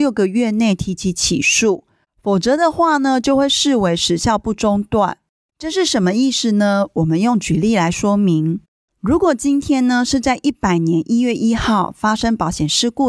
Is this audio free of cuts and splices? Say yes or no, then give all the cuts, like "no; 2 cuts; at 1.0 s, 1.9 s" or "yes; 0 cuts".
yes; 0 cuts